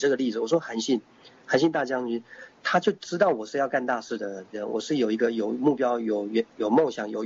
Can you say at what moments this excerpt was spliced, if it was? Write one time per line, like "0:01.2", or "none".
0:04.5